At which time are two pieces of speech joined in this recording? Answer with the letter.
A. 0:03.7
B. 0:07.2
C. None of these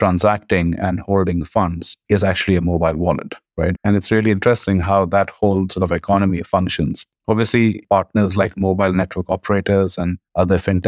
A